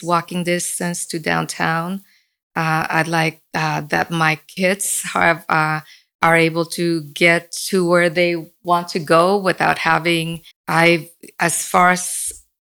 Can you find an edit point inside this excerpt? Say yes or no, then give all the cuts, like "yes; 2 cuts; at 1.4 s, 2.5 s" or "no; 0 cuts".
yes; 1 cut; at 10.5 s